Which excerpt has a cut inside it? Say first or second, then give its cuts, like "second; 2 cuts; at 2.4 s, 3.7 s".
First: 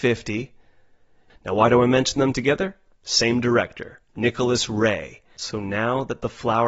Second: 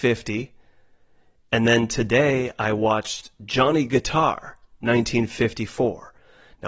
first; 2 cuts; at 1.3 s, 5.4 s